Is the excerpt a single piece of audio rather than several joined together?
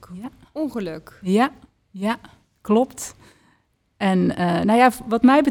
yes; 0 cuts

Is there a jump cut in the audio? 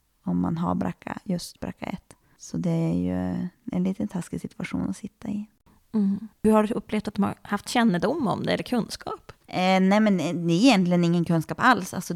no; 0 cuts

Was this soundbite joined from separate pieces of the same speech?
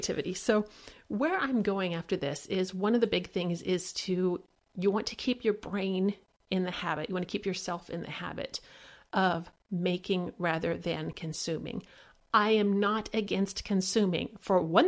no; 0 cuts

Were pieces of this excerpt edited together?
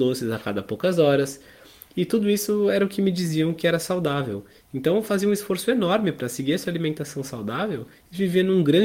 no; 0 cuts

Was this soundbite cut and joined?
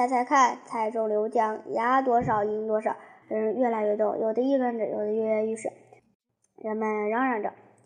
yes; 2 cuts; at 3.2 s, 6.0 s

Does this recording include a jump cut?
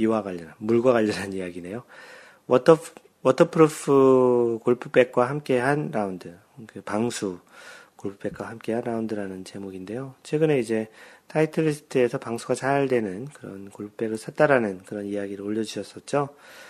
no; 0 cuts

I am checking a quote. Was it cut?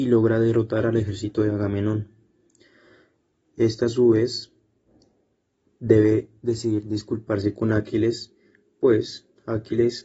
no; 0 cuts

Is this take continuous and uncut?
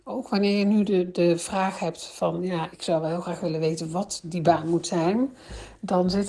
no; 1 cut; at 2.7 s

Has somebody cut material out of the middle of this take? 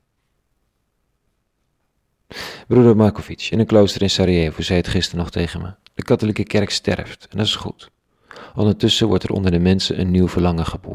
no; 0 cuts

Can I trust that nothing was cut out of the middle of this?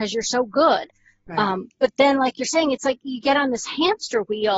yes; 0 cuts

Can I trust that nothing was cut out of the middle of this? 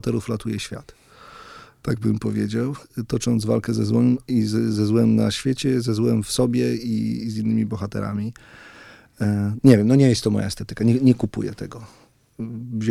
yes; 0 cuts

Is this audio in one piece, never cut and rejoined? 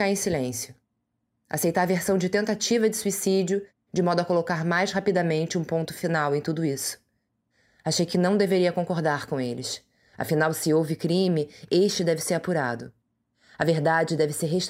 yes; 0 cuts

